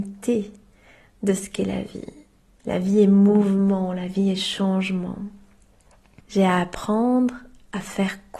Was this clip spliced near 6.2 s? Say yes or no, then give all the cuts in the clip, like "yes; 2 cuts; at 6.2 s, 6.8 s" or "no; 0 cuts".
yes; 2 cuts; at 2.6 s, 6.2 s